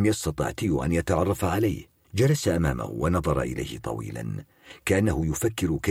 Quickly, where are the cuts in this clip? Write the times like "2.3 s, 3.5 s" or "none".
2.0 s